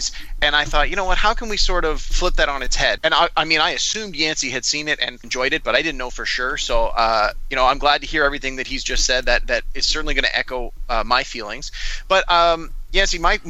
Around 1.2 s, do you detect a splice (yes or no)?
no